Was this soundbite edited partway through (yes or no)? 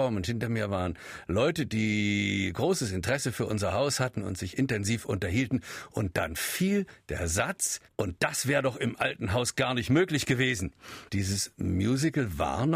yes